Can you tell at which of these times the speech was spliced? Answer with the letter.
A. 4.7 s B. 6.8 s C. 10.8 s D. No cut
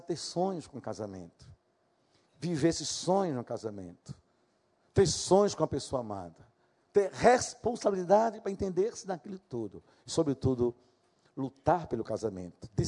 D